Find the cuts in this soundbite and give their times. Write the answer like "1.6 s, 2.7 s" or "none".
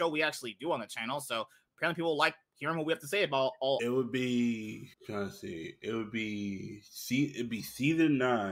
3.8 s, 4.9 s